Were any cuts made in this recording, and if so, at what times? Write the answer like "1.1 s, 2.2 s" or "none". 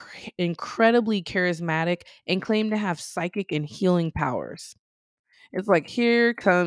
none